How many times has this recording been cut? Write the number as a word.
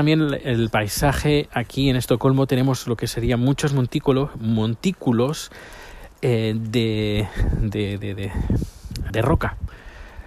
one